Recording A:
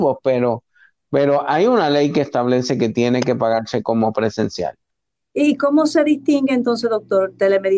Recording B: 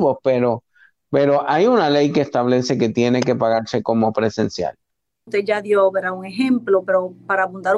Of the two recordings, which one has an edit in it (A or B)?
B